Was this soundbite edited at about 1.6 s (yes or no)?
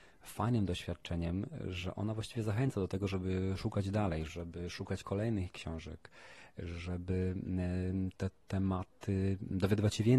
no